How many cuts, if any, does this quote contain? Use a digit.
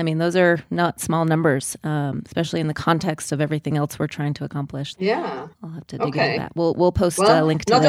1